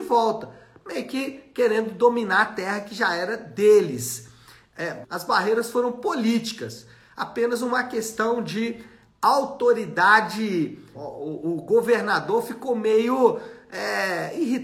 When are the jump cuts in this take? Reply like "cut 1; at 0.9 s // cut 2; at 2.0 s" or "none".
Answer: cut 1; at 5.0 s // cut 2; at 10.9 s